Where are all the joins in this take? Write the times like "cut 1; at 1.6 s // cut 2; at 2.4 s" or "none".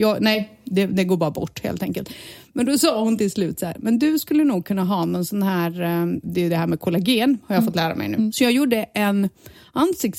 cut 1; at 6.2 s // cut 2; at 8.3 s